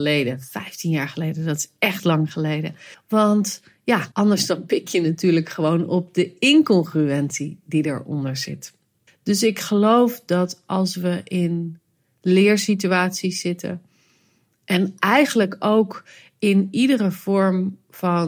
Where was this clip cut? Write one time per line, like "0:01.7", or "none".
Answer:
0:02.9
0:04.1
0:09.1